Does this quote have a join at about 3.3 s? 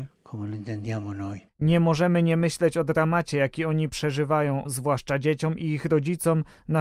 no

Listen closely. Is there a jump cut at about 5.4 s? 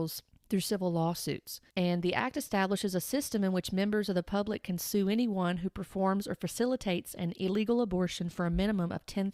no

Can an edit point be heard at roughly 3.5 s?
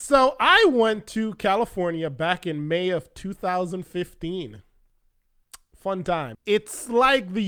no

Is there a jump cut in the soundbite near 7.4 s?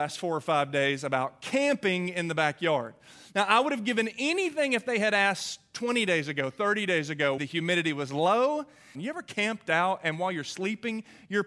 yes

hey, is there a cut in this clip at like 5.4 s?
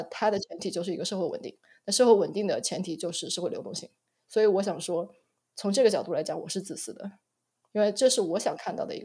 no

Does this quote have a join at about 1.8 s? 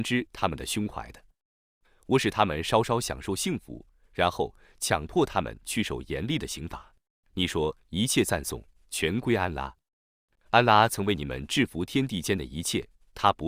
no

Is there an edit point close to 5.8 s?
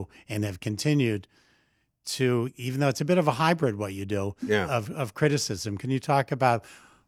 no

